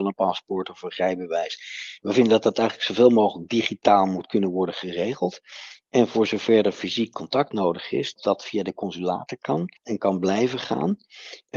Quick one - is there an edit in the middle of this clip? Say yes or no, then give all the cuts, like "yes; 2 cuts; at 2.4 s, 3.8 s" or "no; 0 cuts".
yes; 2 cuts; at 8.2 s, 9.8 s